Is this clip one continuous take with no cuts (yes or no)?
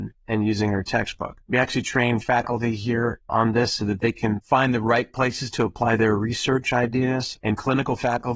no